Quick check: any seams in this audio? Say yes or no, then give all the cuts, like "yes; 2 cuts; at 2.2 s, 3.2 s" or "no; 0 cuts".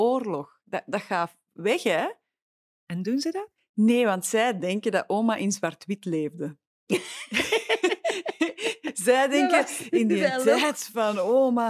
yes; 1 cut; at 2.6 s